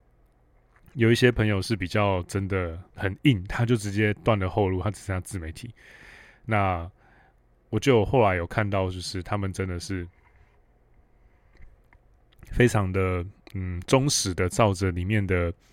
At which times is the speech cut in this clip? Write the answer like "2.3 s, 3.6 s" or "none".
2.9 s